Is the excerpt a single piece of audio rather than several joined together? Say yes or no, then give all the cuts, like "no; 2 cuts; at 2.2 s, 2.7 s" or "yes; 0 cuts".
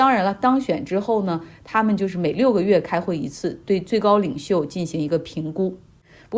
yes; 0 cuts